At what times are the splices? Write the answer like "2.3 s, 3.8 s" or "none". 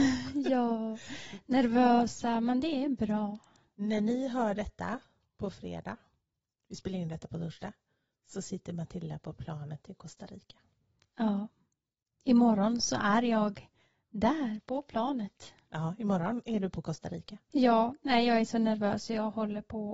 none